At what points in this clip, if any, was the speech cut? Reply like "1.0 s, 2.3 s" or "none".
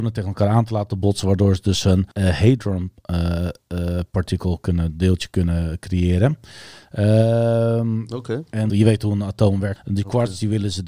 2.1 s, 8.7 s, 9.8 s